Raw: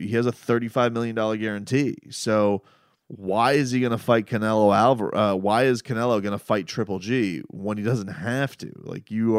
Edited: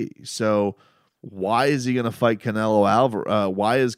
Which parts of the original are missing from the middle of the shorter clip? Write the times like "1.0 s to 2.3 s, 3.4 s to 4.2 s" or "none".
none